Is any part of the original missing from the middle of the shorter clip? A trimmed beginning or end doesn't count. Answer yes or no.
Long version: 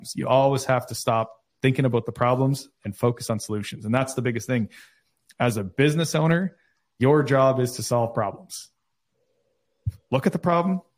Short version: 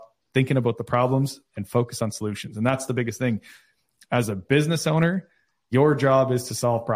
no